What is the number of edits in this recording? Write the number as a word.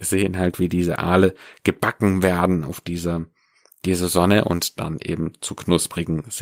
zero